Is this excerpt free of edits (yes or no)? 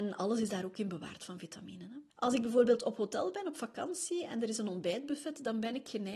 no